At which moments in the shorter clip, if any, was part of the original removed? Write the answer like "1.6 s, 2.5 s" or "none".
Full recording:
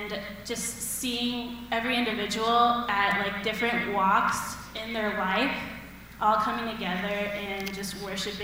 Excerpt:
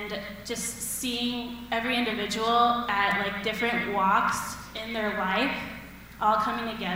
none